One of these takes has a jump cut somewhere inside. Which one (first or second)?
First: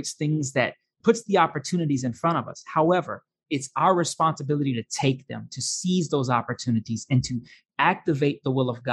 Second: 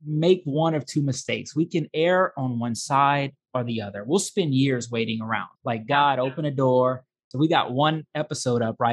second